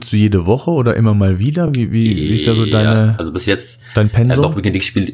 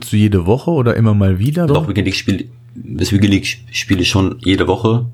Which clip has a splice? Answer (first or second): second